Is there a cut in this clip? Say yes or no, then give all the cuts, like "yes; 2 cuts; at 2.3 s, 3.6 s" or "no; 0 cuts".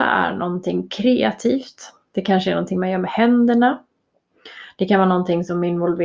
no; 0 cuts